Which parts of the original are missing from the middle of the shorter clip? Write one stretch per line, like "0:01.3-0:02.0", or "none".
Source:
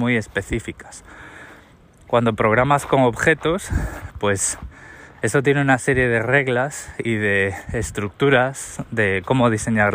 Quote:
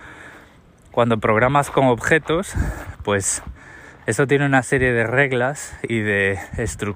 none